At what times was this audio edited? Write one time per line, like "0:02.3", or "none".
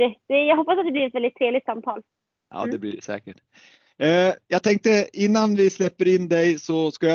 none